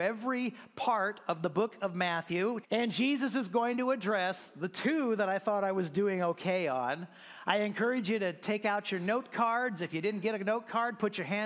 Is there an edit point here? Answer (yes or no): yes